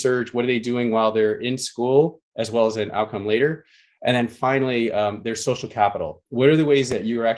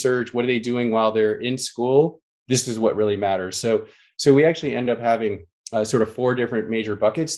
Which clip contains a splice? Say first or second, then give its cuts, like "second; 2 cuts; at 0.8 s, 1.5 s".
second; 1 cut; at 2.3 s